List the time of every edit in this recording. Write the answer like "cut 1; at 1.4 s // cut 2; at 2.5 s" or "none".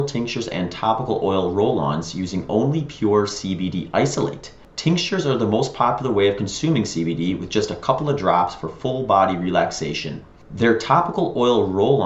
none